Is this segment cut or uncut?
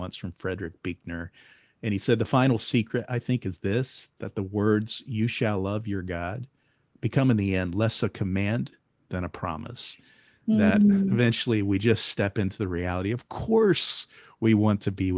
uncut